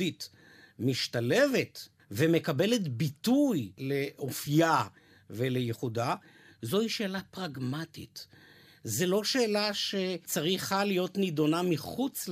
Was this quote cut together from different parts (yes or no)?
no